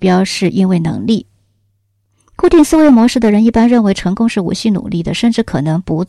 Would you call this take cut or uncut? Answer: uncut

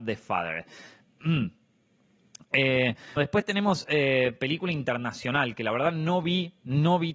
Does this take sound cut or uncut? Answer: cut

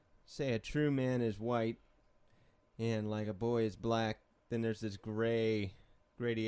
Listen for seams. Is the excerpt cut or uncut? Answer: uncut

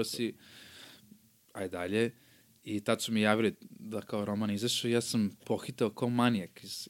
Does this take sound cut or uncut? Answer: uncut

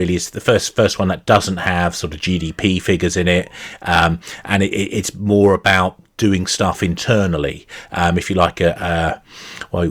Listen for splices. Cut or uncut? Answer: uncut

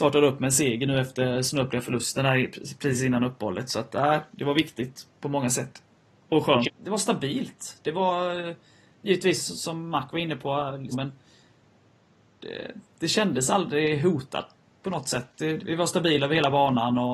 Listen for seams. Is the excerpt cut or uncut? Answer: cut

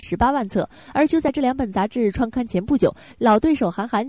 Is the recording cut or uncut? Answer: uncut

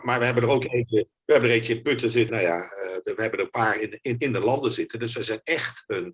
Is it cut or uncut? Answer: cut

